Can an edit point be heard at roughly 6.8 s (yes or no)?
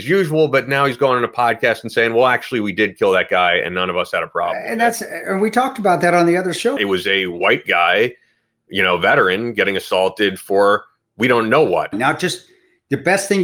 yes